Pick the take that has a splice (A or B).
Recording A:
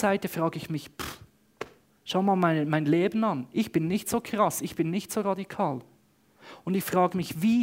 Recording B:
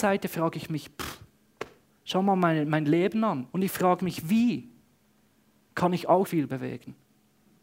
B